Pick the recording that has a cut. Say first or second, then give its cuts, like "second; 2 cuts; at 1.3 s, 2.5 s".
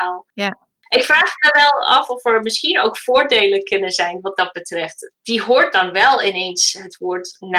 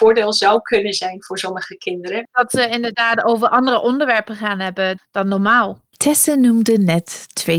second; 1 cut; at 5.0 s